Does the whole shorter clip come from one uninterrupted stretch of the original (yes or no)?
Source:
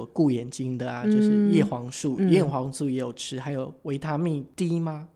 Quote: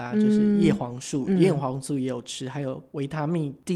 yes